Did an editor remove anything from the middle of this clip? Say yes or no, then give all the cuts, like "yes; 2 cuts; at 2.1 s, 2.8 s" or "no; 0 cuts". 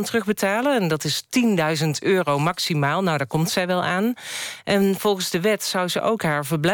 no; 0 cuts